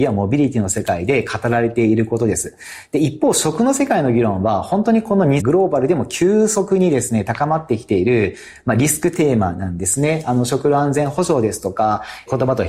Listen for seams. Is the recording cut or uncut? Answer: cut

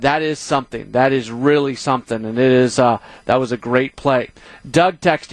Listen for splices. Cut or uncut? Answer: uncut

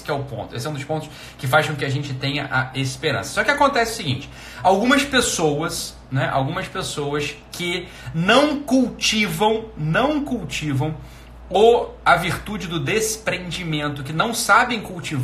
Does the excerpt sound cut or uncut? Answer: uncut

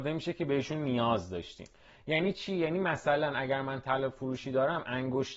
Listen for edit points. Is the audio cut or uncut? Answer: uncut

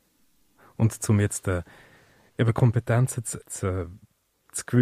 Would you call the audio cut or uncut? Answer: cut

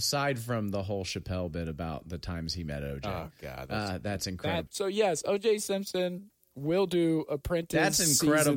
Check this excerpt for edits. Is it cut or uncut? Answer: cut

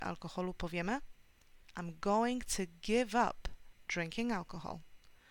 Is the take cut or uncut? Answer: uncut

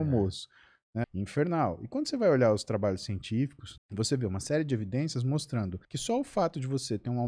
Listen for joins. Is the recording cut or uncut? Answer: cut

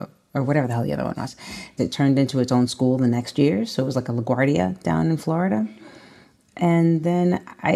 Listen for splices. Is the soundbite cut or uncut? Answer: cut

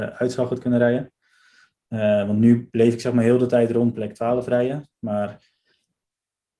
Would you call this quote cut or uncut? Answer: uncut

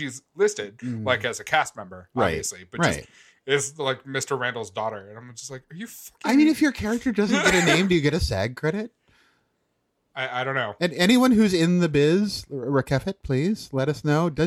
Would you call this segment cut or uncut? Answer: uncut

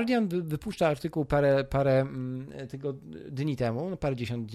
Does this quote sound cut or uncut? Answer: uncut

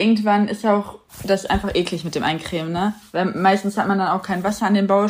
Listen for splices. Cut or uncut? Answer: uncut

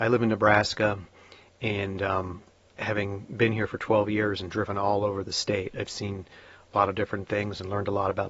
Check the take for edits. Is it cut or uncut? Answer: cut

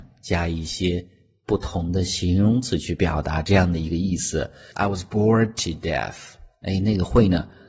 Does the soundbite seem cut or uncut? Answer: cut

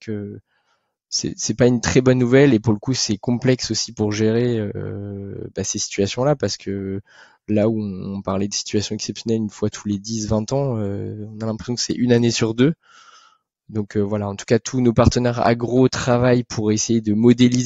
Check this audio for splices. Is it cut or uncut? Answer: uncut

